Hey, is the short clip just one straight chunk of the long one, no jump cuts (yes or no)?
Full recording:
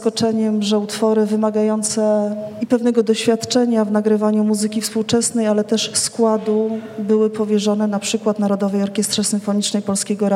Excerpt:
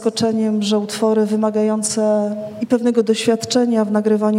yes